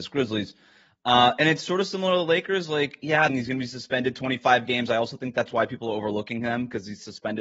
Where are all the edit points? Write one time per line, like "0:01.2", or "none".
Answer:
0:03.3